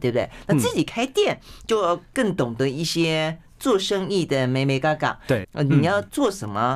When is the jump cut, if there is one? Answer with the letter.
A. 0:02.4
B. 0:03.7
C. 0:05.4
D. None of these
C